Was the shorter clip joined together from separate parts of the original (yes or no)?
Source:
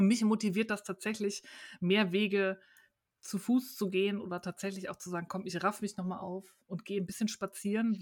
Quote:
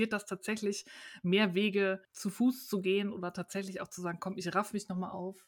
yes